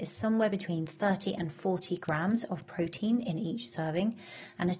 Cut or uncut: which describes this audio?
uncut